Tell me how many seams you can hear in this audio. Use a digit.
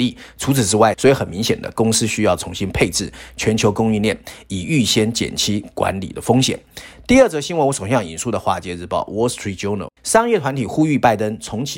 2